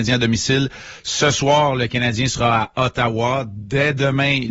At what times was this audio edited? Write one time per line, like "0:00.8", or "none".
none